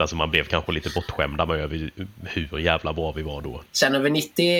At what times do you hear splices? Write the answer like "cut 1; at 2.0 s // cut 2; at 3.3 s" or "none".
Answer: cut 1; at 3.7 s

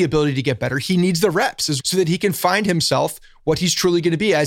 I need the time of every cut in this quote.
cut 1; at 1.8 s

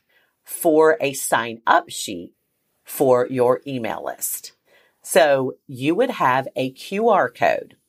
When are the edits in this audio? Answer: none

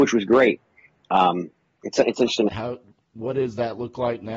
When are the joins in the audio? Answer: cut 1; at 2.5 s

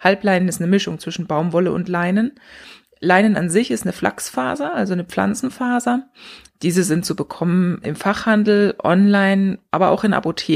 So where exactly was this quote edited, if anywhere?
cut 1; at 6.5 s // cut 2; at 7.8 s

